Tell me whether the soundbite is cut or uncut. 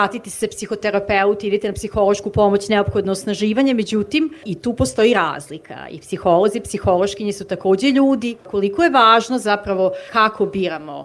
cut